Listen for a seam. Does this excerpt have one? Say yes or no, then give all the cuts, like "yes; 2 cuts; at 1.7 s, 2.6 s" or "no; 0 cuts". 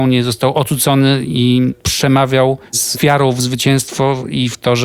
yes; 1 cut; at 2.7 s